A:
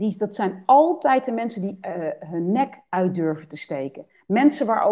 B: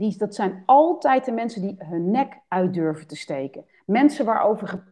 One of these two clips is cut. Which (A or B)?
B